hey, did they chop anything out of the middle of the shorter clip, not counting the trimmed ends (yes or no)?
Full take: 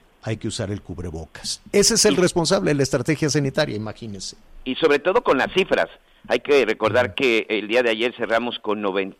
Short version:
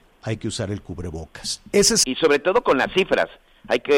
yes